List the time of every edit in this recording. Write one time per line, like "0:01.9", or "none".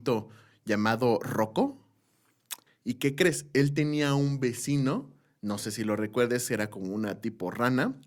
0:02.7